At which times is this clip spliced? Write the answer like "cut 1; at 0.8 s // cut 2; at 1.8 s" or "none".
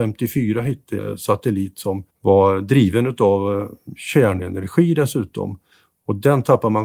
cut 1; at 1.0 s // cut 2; at 2.1 s